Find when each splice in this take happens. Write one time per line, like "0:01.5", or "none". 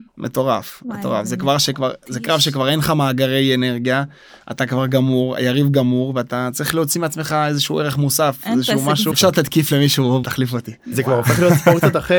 0:09.1
0:10.2